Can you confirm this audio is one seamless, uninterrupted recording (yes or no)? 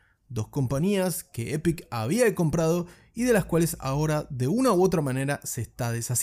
yes